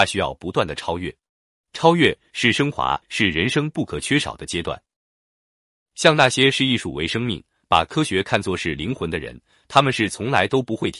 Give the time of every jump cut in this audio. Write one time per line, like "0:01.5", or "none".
0:03.0
0:05.8